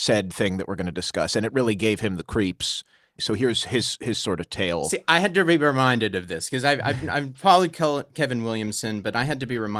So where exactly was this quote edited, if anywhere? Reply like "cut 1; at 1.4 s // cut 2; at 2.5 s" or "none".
cut 1; at 3.2 s